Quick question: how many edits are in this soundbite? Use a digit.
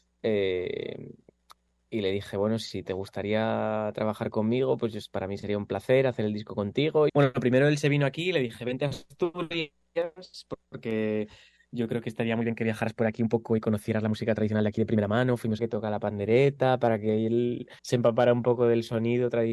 3